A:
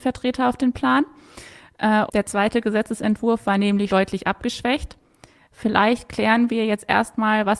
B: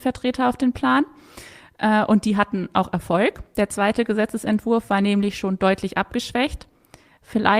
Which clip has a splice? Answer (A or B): A